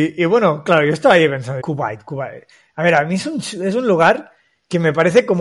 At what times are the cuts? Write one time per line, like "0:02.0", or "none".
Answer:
0:01.6